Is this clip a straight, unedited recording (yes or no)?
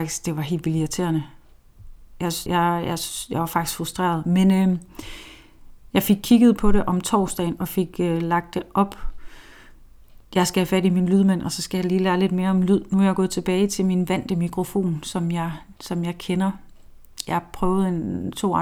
no